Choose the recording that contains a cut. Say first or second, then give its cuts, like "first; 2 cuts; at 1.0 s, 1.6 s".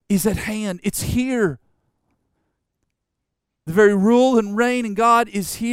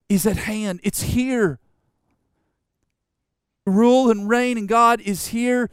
second; 1 cut; at 3.7 s